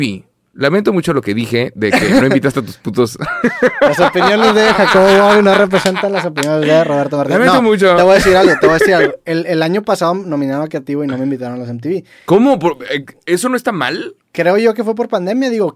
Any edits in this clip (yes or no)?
no